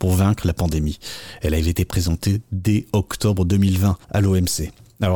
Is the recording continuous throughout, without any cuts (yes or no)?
no